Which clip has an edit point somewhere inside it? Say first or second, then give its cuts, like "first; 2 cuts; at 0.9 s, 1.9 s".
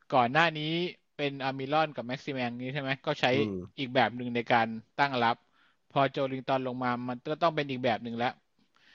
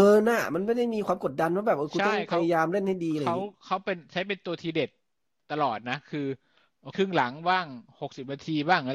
second; 1 cut; at 6.9 s